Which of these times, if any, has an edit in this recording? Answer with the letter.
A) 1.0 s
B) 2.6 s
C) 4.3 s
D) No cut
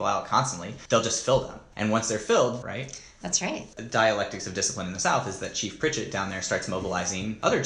B